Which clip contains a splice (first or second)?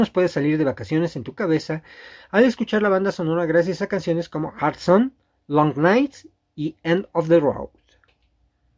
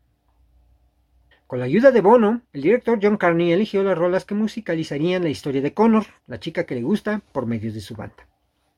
second